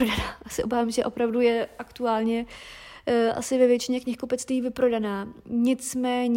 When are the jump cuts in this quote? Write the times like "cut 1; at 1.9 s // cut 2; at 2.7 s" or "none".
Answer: none